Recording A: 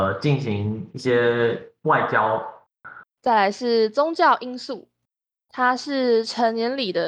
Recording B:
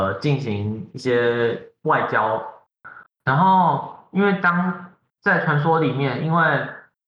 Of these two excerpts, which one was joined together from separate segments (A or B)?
A